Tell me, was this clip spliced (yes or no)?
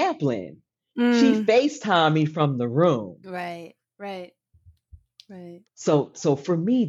yes